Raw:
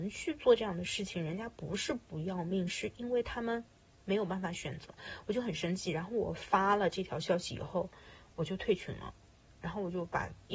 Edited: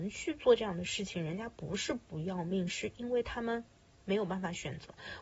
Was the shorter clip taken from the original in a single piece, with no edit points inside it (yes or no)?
yes